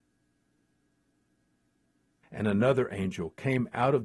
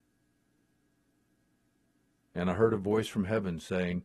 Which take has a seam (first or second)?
first